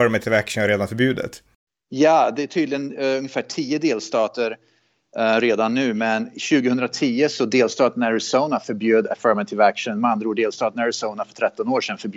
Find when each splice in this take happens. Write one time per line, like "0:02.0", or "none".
none